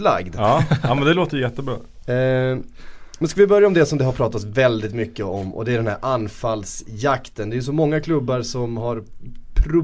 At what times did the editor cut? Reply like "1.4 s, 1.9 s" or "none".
none